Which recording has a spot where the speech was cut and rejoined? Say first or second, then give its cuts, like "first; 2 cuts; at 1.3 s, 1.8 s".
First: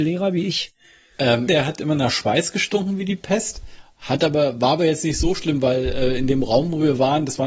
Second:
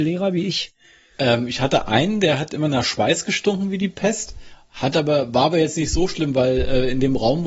first; 1 cut; at 1.5 s